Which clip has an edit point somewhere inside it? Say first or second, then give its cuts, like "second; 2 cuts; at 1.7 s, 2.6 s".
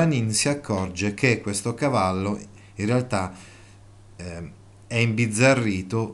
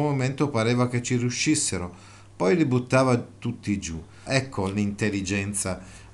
second; 1 cut; at 4.3 s